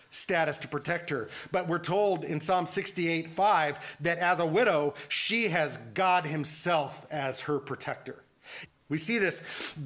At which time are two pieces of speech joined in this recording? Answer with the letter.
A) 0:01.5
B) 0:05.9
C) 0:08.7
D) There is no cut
C